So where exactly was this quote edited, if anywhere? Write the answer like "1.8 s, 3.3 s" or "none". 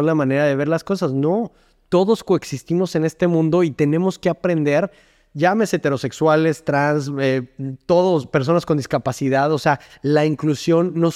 none